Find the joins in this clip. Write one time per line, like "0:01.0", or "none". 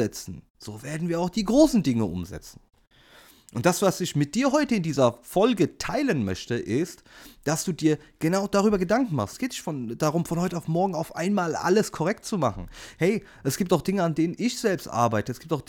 0:09.3